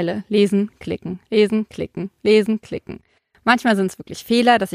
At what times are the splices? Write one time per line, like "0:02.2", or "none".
none